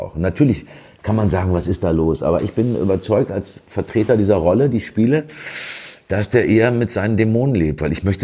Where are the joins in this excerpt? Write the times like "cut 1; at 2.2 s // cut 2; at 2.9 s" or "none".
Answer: none

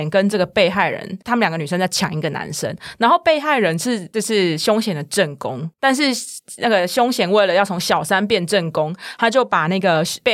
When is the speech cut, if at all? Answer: none

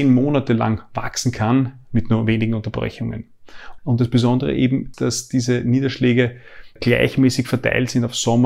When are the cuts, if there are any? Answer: cut 1; at 3.8 s // cut 2; at 4.9 s // cut 3; at 6.8 s

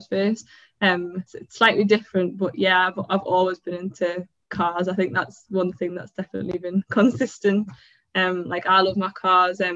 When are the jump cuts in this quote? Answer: cut 1; at 1.3 s

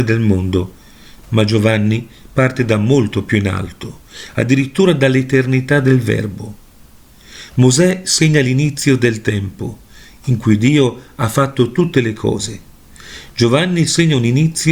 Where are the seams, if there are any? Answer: none

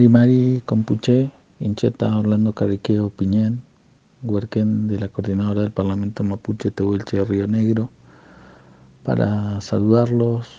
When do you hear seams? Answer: none

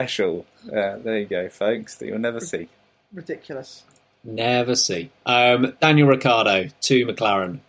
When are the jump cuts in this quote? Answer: none

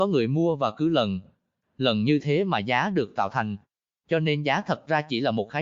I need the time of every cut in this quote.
none

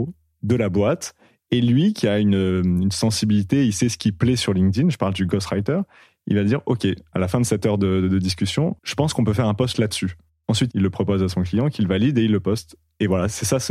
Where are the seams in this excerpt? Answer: cut 1; at 8.8 s // cut 2; at 10.7 s

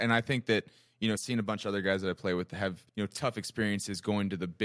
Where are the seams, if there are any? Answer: cut 1; at 1.2 s // cut 2; at 2.9 s

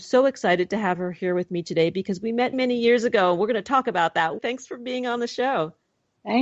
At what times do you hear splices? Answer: cut 1; at 2.5 s // cut 2; at 4.4 s

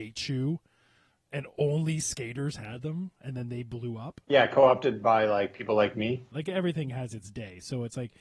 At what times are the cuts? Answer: cut 1; at 4.2 s // cut 2; at 6.3 s

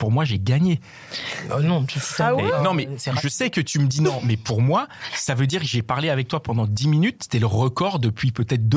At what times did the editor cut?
none

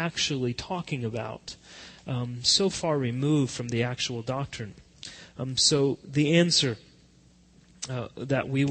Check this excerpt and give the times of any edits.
none

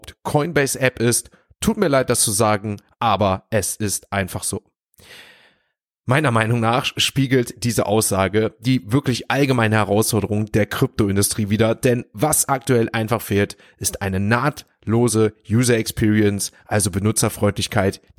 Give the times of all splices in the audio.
none

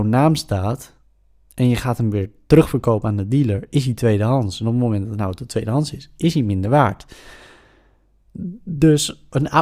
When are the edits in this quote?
none

